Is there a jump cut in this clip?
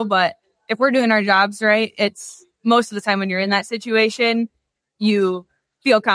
no; 0 cuts

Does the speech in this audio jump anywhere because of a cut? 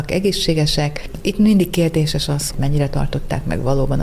yes; 1 cut; at 2.5 s

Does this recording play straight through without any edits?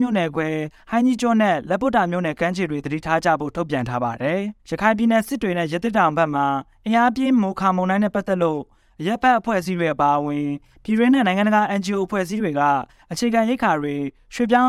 no; 1 cut; at 4.6 s

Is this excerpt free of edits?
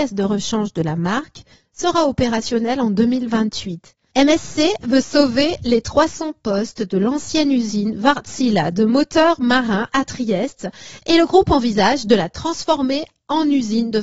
no; 1 cut; at 4.1 s

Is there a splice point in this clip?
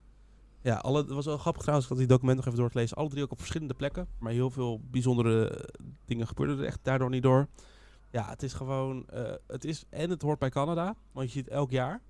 yes; 2 cuts; at 4.2 s, 8.0 s

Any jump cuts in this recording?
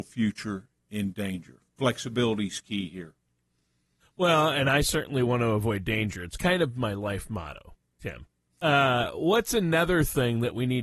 no; 0 cuts

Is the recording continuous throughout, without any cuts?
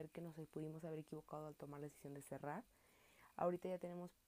yes; 0 cuts

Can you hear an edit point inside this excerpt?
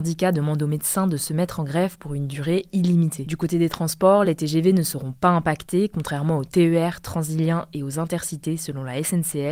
no; 0 cuts

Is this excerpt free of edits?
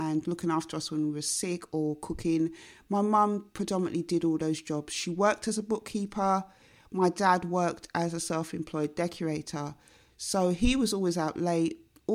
yes; 0 cuts

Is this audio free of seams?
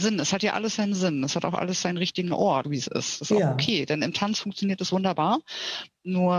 no; 1 cut; at 2.6 s

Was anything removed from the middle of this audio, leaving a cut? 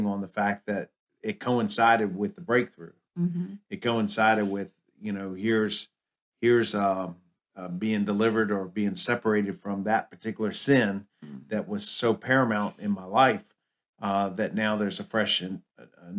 no; 0 cuts

